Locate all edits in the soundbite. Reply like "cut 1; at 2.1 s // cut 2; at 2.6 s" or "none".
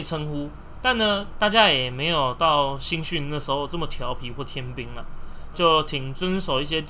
cut 1; at 1.3 s // cut 2; at 5.5 s